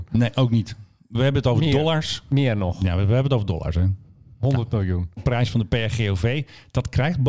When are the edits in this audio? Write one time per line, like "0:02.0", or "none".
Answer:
0:05.2